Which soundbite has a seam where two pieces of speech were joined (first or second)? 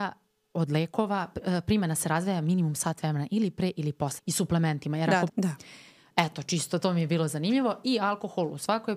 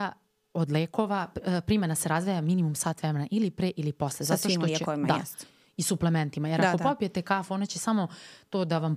first